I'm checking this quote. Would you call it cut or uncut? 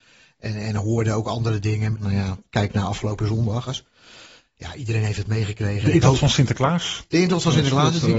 cut